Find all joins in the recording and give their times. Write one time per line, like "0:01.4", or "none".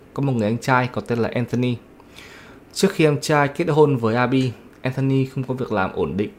none

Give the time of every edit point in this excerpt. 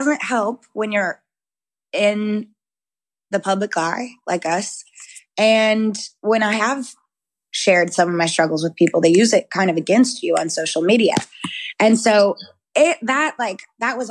none

